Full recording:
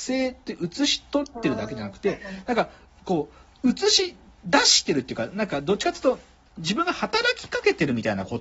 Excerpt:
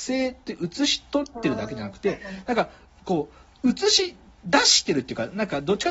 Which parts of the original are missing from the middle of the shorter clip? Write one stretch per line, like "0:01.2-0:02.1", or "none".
none